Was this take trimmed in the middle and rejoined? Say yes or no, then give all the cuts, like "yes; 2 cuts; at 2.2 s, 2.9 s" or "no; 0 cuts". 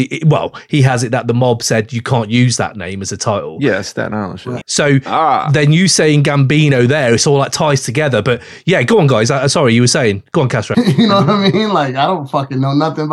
yes; 2 cuts; at 4.6 s, 10.7 s